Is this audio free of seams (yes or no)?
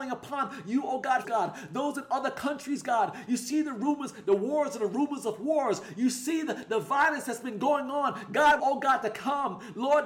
no